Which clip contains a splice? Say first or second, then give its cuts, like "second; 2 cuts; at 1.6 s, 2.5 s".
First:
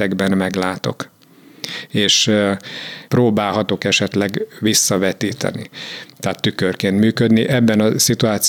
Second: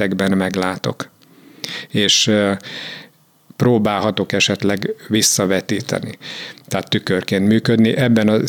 first; 1 cut; at 3.1 s